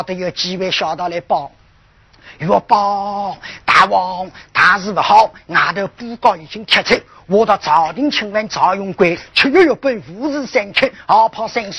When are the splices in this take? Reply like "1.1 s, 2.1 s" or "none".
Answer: none